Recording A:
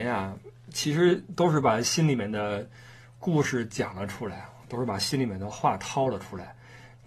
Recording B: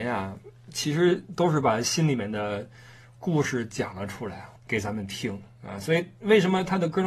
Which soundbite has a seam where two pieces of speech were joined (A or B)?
B